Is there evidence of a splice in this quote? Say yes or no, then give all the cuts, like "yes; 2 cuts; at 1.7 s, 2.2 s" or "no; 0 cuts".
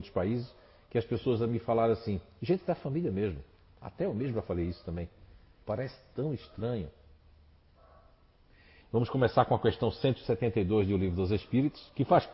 yes; 2 cuts; at 5.6 s, 8.8 s